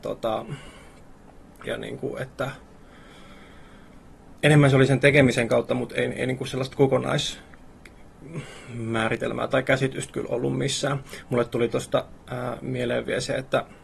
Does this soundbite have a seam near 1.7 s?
yes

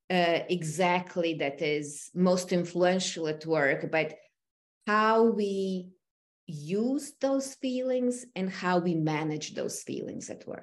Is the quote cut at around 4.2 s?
no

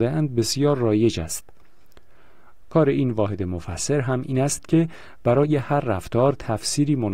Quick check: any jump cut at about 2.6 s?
yes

